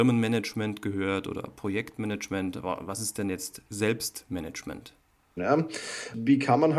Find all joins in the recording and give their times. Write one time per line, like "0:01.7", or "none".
0:05.4